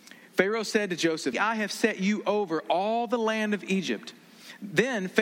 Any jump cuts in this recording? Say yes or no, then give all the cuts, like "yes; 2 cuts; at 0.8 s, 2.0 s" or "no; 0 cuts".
yes; 1 cut; at 1.3 s